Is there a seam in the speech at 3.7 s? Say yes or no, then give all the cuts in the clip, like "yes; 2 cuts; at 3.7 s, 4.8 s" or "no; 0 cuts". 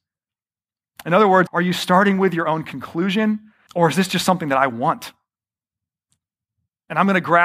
yes; 2 cuts; at 1.5 s, 3.7 s